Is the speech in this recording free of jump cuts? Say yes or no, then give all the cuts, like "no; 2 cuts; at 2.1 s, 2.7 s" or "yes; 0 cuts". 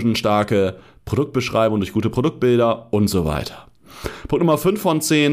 yes; 0 cuts